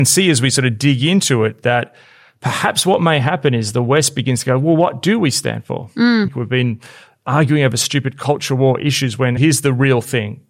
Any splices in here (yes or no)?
yes